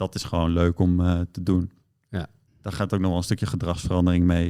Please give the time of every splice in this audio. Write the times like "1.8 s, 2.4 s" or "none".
2.5 s